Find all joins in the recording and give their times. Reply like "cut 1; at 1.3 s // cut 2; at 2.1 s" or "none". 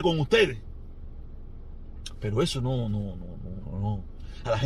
cut 1; at 3.6 s